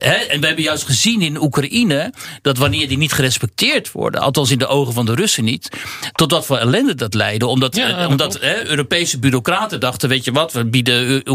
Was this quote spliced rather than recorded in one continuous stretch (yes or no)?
no